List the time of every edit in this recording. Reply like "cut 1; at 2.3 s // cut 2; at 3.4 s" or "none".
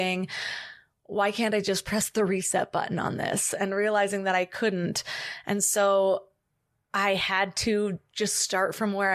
none